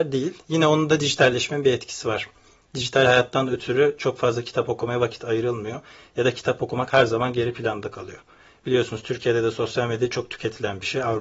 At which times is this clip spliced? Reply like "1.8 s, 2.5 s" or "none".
none